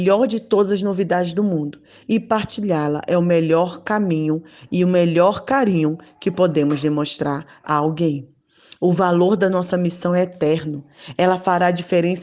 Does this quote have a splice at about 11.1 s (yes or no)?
no